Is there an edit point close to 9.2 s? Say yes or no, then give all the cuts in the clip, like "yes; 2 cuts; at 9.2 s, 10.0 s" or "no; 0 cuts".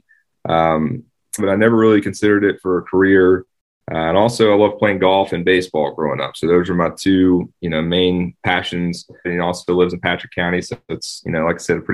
yes; 2 cuts; at 1.4 s, 9.2 s